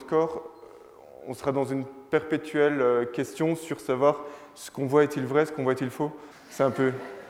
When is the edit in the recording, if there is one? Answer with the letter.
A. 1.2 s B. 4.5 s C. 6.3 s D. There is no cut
C